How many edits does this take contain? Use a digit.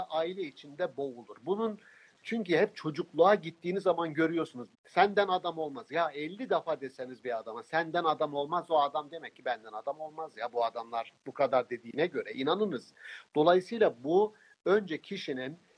1